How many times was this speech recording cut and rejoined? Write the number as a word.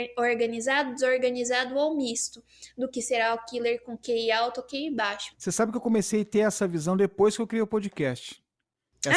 one